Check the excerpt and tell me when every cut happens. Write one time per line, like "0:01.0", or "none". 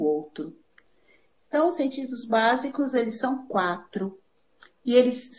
0:01.4